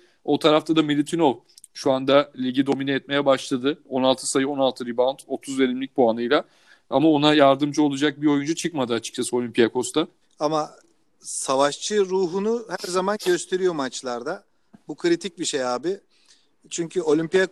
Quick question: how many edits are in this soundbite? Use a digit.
1